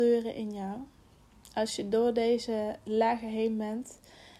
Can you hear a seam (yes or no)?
no